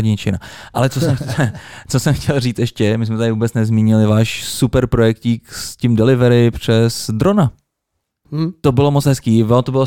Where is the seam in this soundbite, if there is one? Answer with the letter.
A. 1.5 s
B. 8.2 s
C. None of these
B